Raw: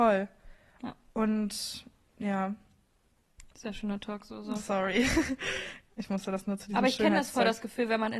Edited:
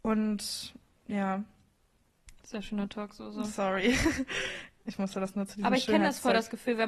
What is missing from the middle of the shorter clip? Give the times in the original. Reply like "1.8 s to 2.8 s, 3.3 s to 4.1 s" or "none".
none